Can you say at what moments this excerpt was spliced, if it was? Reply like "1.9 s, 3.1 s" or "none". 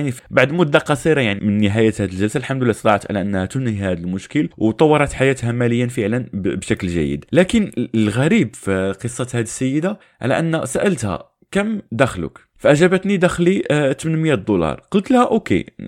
1.4 s